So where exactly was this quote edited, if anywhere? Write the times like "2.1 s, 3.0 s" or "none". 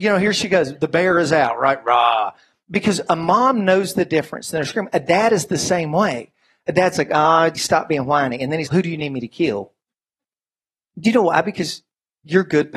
7.5 s, 8.7 s